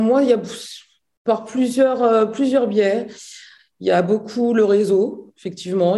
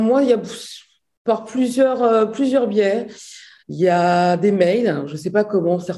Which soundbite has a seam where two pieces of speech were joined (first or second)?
second